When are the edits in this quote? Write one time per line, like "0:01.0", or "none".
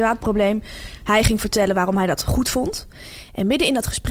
none